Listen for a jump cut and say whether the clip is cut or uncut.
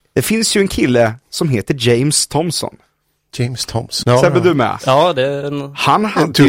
cut